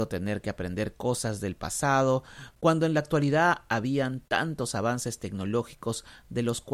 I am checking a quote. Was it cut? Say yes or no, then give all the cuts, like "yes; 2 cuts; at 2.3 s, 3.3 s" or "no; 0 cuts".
no; 0 cuts